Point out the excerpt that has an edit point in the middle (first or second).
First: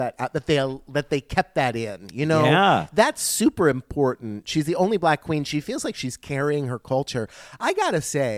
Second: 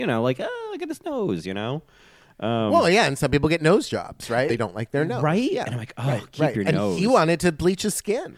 second